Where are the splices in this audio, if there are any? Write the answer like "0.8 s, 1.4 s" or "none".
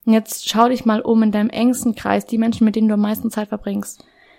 none